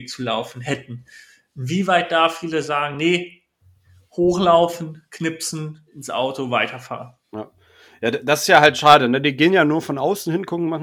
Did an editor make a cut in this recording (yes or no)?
no